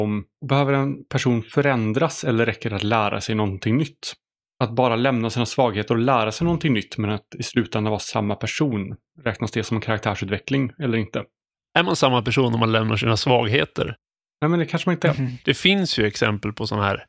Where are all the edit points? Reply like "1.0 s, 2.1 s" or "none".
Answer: 4.5 s, 15.4 s